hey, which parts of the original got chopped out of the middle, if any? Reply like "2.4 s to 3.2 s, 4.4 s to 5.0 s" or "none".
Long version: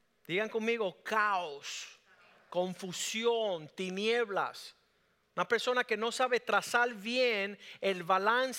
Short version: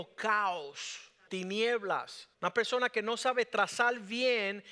2.1 s to 3.7 s, 4.8 s to 5.3 s